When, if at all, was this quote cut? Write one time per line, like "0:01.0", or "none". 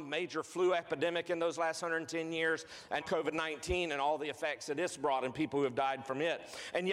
0:03.0